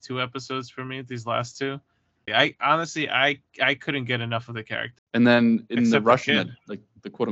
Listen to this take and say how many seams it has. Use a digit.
2